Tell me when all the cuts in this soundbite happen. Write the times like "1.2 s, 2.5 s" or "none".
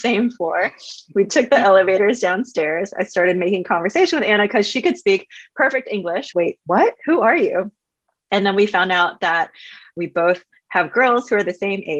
6.3 s